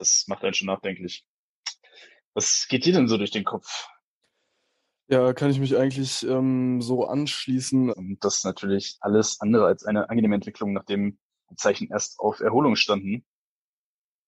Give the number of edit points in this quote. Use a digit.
1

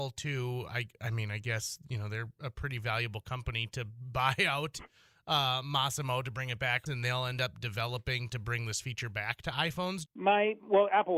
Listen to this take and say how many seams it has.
2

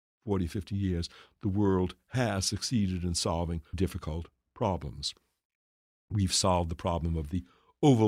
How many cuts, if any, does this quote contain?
1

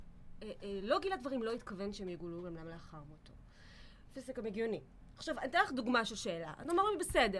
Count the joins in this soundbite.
0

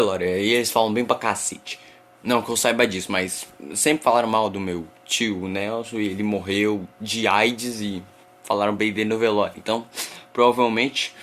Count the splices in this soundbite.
0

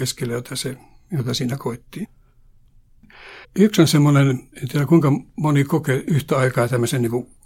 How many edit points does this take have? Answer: 2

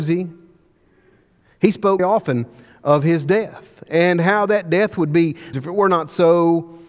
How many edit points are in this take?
2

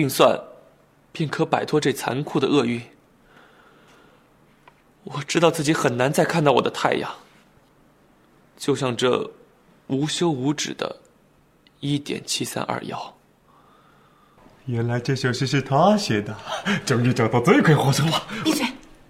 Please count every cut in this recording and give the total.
0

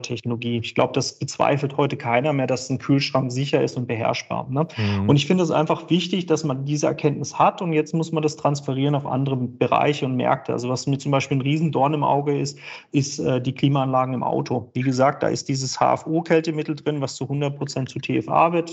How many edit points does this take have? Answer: 0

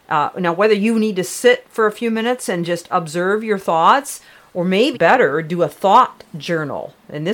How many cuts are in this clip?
1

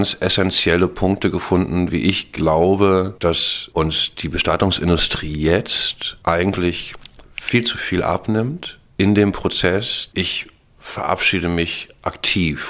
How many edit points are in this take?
0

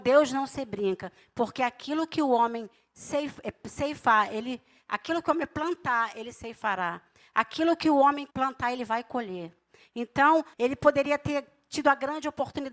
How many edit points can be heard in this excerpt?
2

